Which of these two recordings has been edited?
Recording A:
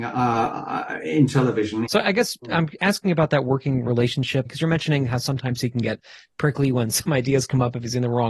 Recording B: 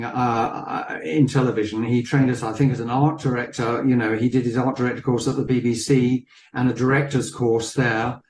A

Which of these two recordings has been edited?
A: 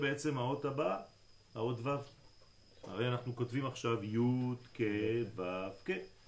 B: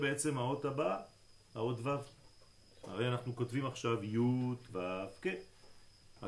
B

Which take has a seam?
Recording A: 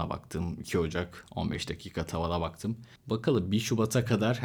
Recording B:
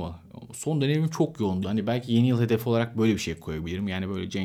B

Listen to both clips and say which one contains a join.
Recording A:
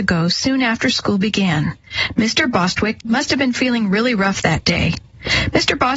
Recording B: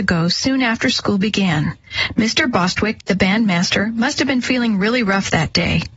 A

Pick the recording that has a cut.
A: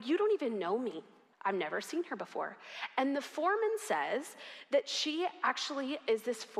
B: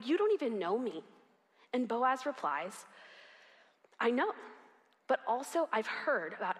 A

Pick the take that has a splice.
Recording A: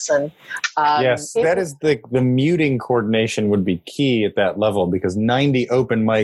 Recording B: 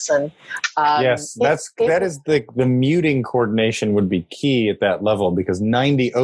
A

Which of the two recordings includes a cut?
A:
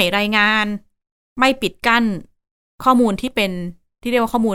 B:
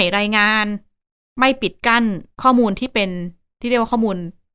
B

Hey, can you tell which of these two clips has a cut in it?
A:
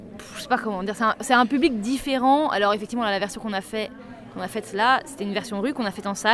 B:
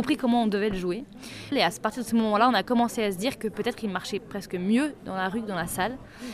B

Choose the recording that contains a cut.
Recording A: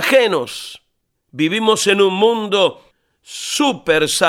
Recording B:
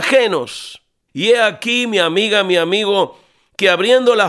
B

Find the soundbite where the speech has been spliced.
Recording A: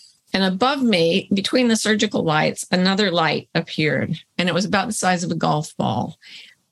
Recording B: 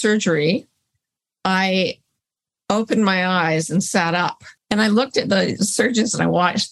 B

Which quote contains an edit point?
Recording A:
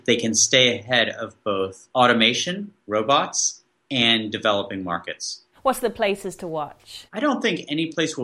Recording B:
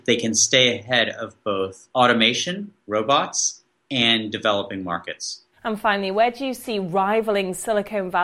A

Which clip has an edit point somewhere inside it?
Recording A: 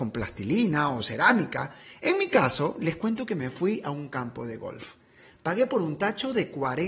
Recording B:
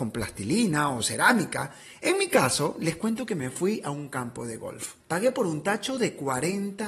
B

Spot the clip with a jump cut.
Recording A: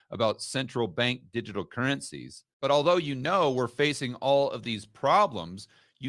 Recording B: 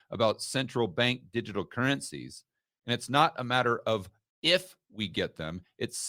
A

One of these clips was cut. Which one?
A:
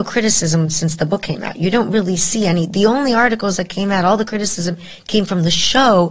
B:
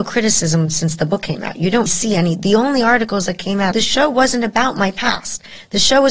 B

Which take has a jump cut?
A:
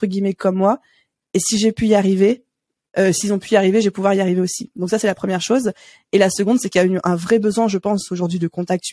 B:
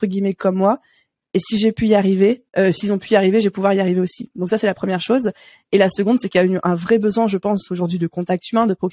B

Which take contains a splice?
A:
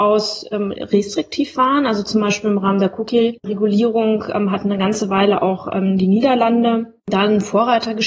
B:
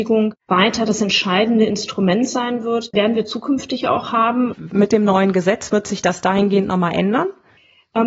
B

